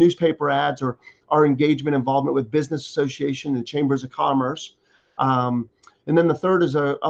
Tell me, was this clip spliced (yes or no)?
no